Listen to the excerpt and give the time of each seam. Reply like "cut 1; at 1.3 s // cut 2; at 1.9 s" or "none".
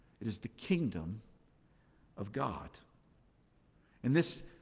none